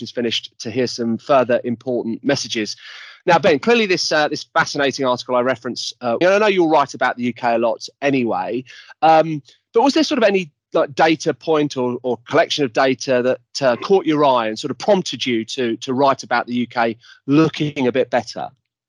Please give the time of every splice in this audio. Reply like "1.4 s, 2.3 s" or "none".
6.2 s